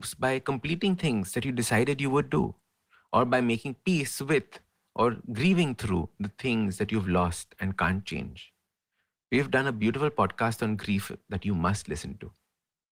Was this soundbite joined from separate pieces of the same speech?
no; 0 cuts

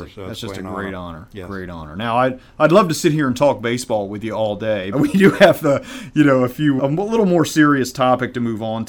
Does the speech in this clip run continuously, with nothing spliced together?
no; 2 cuts; at 4.9 s, 6.8 s

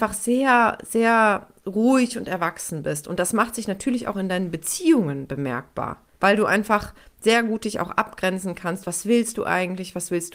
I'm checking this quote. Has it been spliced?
yes; 2 cuts; at 6.1 s, 8.8 s

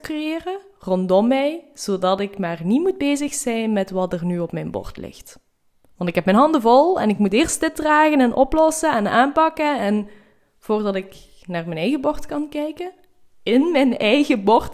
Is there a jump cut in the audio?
no; 0 cuts

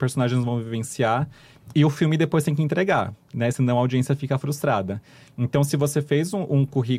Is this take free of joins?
yes; 0 cuts

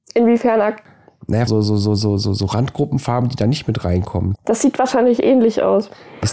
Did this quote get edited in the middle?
yes; 2 cuts; at 1.5 s, 4.3 s

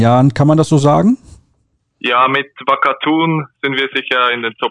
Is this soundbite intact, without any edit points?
yes; 0 cuts

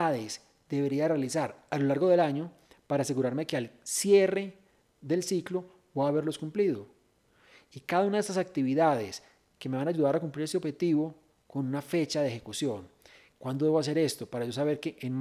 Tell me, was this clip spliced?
no; 0 cuts

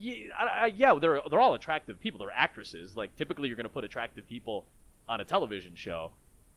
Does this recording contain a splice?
no; 0 cuts

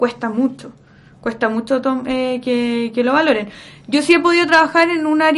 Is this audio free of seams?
yes; 0 cuts

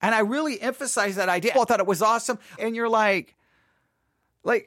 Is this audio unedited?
no; 2 cuts; at 1.5 s, 2.6 s

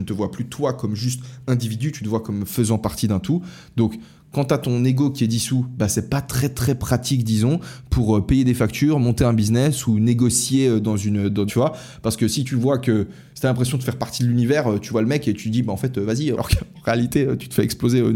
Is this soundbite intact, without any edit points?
no; 2 cuts; at 11.5 s, 16.3 s

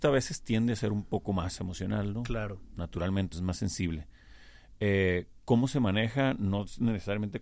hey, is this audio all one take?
no; 1 cut; at 3.3 s

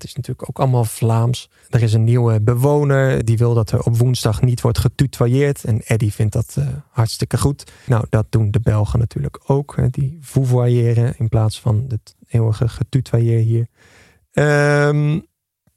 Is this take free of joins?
no; 2 cuts; at 3.2 s, 7.9 s

